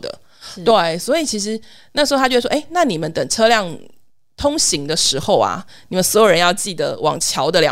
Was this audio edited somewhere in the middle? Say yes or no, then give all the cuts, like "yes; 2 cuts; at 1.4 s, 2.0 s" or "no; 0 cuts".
no; 0 cuts